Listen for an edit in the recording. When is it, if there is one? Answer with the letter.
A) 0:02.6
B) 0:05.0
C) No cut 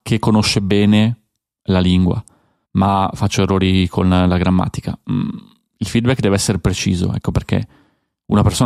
A